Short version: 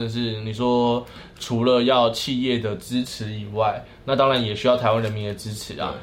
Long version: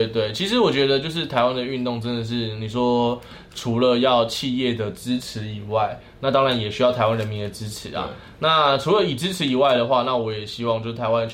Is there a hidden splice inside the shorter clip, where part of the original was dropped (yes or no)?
no